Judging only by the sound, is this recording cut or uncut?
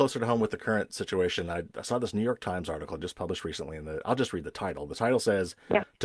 uncut